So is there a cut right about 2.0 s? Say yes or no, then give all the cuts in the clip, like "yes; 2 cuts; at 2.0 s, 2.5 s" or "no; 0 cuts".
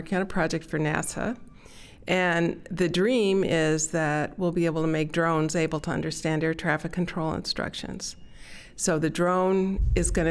no; 0 cuts